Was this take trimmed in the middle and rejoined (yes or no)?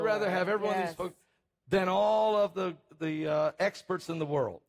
no